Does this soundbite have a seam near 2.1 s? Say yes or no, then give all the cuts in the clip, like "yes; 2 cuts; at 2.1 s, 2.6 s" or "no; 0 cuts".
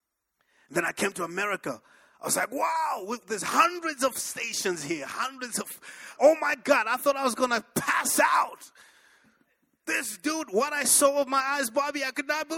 no; 1 cut; at 6.2 s